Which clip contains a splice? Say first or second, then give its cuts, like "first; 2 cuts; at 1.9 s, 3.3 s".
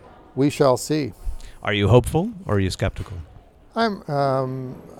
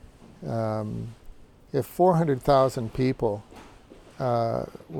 first; 1 cut; at 4.0 s